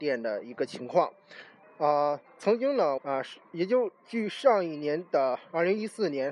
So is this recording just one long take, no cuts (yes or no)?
no